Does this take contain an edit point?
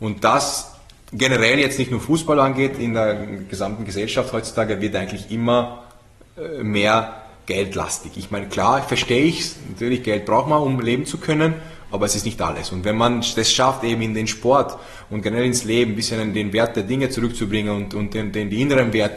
no; 0 cuts

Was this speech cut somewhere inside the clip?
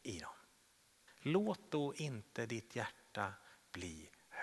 yes; 1 cut; at 1.1 s

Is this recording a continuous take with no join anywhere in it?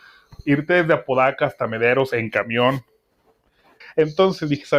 no; 1 cut; at 3.8 s

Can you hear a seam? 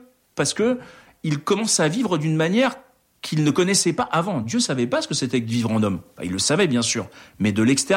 no; 0 cuts

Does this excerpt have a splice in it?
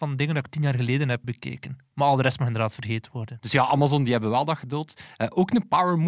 yes; 2 cuts; at 1.2 s, 3.4 s

